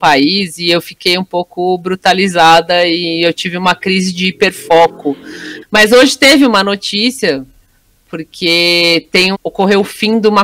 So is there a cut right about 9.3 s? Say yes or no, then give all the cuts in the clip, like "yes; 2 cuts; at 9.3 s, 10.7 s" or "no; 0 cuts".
yes; 2 cuts; at 5.6 s, 9.3 s